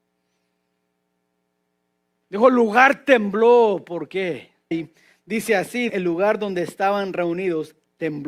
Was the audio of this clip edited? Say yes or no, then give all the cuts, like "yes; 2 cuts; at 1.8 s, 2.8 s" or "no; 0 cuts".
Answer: yes; 2 cuts; at 4.7 s, 5.9 s